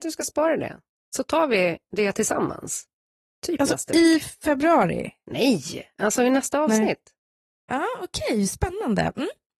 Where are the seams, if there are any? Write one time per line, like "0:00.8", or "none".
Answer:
none